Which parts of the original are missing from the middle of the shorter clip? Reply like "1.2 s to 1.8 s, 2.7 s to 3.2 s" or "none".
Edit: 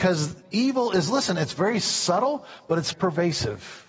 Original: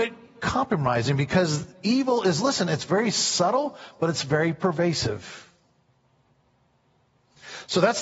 4.2 s to 4.5 s